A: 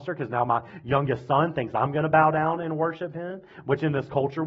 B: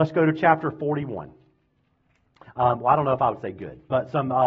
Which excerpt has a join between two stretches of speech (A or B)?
B